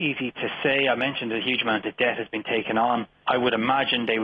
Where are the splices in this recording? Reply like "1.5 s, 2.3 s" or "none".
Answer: 3.2 s